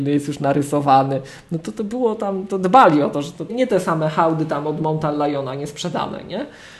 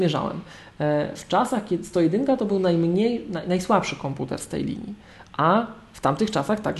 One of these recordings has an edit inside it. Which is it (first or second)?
first